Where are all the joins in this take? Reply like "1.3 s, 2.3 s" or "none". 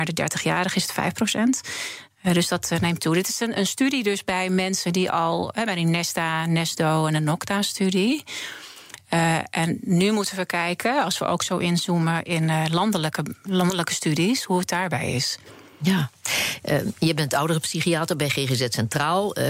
none